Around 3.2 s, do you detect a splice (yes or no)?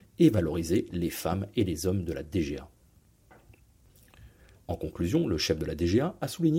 no